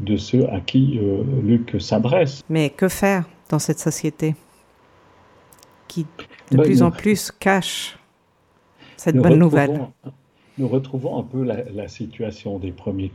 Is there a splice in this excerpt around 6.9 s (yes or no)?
no